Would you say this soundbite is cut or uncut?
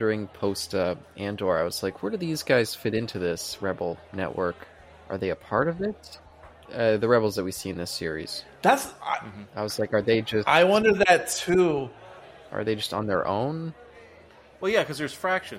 cut